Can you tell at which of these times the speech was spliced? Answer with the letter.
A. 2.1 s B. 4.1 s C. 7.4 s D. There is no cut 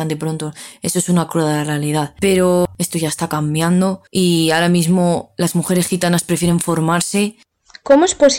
B